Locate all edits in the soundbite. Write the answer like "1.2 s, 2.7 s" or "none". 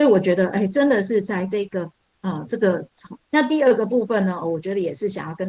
3.3 s